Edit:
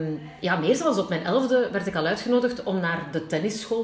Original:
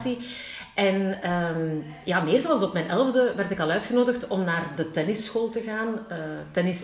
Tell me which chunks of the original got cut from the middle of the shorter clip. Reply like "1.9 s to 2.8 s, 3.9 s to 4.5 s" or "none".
none